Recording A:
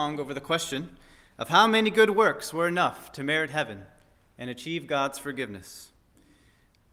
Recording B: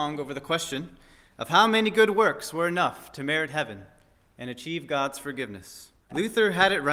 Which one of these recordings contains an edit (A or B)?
B